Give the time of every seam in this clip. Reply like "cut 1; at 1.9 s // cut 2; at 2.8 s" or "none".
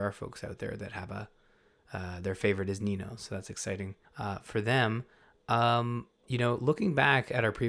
cut 1; at 4.0 s // cut 2; at 6.2 s